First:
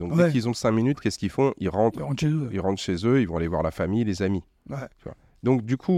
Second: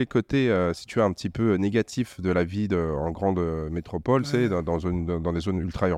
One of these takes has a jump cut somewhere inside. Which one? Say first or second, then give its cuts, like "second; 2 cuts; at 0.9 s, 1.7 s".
first; 1 cut; at 4.9 s